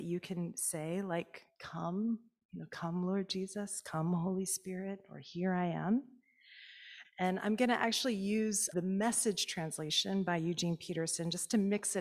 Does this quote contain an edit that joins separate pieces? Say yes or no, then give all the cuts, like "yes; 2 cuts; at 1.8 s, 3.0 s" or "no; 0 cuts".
yes; 2 cuts; at 7.0 s, 8.7 s